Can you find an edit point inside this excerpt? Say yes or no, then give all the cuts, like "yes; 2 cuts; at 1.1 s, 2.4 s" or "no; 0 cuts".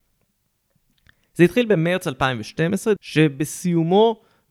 yes; 1 cut; at 3.0 s